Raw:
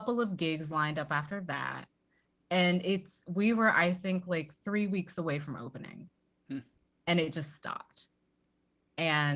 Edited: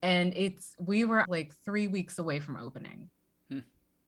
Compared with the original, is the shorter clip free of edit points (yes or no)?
no